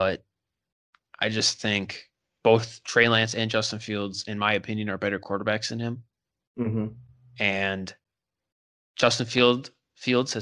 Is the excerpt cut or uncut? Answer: uncut